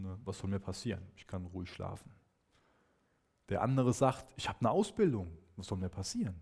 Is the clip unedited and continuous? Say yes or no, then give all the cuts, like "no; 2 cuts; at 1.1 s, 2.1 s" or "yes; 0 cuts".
yes; 0 cuts